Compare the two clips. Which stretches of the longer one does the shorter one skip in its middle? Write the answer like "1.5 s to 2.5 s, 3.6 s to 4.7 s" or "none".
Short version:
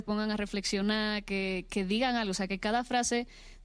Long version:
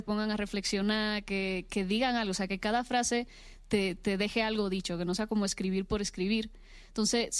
none

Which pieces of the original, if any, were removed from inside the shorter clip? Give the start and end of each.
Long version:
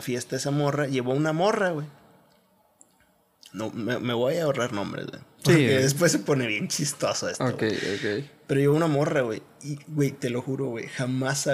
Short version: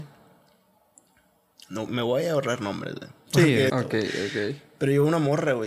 3.7 s to 4.0 s, 5.8 s to 7.4 s

